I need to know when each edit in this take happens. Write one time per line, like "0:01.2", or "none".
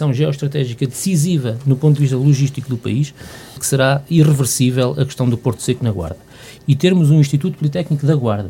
0:03.6
0:06.6